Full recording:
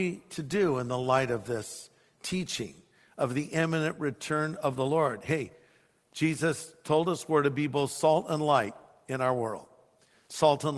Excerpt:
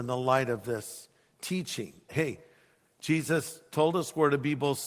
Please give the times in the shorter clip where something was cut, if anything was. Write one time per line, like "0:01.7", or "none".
0:02.1